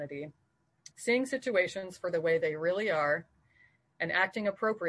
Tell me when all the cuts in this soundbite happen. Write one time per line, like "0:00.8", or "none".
0:00.9